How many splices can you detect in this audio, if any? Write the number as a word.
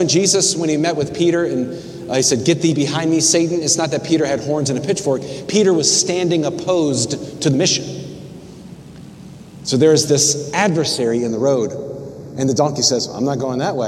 zero